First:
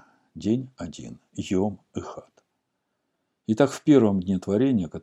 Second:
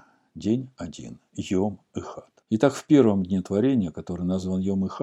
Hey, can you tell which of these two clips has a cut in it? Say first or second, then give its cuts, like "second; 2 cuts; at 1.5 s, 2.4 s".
second; 1 cut; at 2.4 s